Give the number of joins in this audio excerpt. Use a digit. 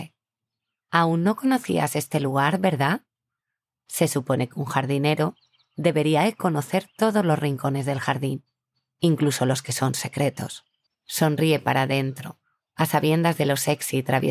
1